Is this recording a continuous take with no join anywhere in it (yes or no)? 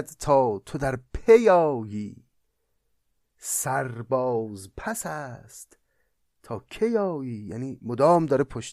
yes